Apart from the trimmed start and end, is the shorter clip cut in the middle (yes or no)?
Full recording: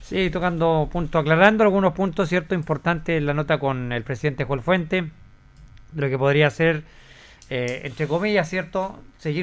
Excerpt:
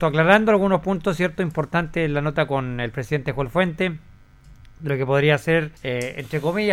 yes